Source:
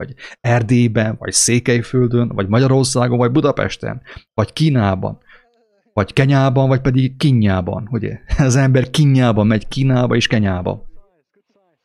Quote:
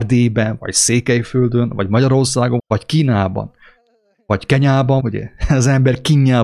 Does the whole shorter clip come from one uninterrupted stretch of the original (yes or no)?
no